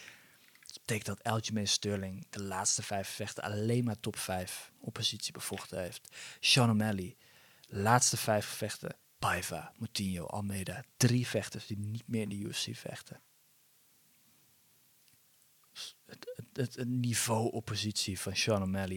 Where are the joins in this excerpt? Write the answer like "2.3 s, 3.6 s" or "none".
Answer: 9.0 s